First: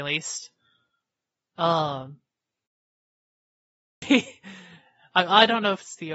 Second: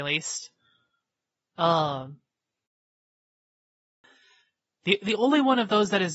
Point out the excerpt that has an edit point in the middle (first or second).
first